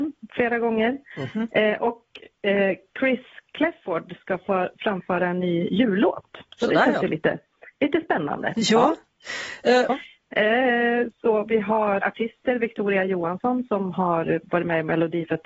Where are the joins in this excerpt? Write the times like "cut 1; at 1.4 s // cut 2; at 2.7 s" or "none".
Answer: cut 1; at 9.9 s // cut 2; at 12.0 s